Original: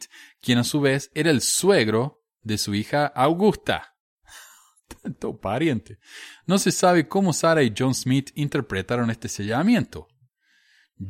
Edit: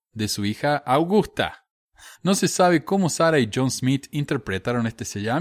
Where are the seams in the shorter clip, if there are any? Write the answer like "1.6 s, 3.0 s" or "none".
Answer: 2.1 s